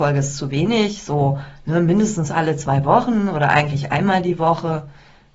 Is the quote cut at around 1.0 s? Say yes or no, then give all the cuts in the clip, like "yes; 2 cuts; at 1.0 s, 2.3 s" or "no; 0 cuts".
no; 0 cuts